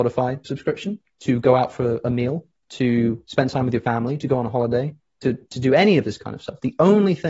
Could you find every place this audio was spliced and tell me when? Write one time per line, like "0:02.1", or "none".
none